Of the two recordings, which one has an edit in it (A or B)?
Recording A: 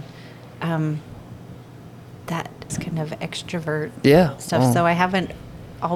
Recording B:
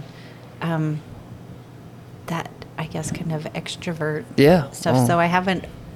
A